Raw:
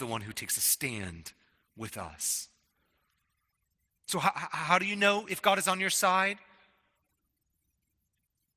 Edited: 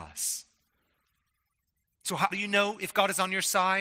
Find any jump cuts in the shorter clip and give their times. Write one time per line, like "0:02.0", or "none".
0:02.3